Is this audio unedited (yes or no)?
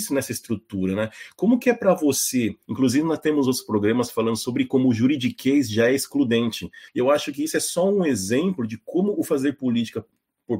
no